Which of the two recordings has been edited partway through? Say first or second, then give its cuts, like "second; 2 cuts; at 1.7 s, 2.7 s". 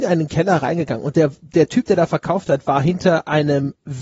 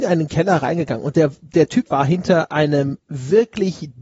second; 1 cut; at 1.9 s